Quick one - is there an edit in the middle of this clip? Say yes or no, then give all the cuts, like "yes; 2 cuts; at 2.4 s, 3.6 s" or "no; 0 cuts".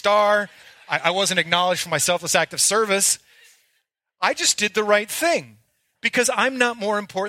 no; 0 cuts